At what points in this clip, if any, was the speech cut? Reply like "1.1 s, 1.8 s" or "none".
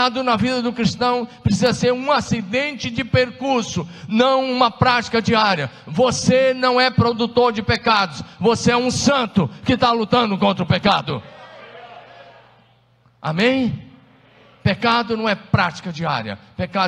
none